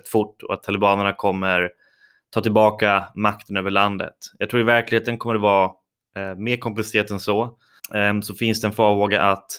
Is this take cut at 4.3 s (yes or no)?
no